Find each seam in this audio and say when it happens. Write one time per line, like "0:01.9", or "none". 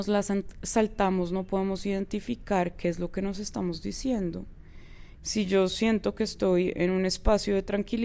0:05.2

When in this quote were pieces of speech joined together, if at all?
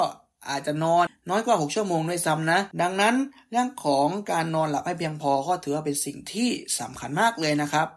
0:01.1
0:02.7

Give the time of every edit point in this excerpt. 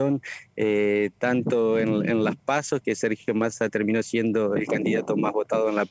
0:02.8
0:04.6

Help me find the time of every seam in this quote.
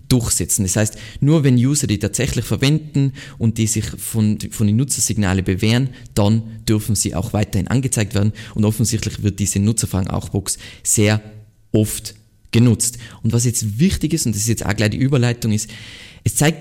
0:04.4

